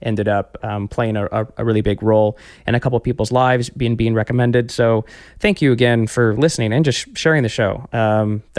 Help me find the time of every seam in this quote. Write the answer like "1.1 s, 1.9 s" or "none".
none

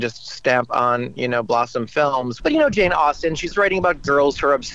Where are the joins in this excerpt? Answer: 2.4 s, 3.5 s

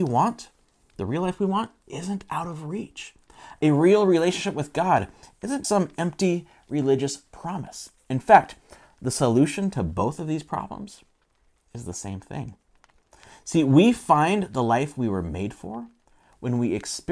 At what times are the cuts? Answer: 5.6 s

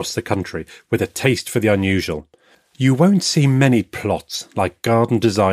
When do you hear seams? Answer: 2.5 s

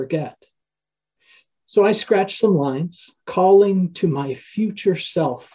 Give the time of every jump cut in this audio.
3.2 s

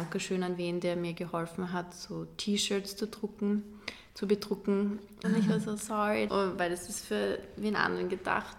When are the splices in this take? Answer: 5.2 s, 6.3 s

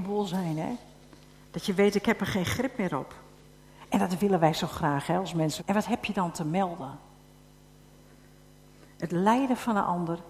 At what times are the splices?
5.6 s

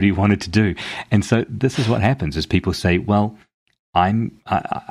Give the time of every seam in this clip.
none

